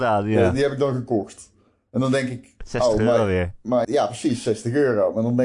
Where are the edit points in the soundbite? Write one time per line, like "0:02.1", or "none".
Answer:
0:03.8